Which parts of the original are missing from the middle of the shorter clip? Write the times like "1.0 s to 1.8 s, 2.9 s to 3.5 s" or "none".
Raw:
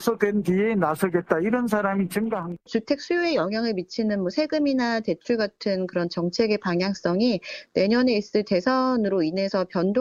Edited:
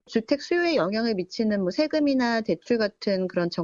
none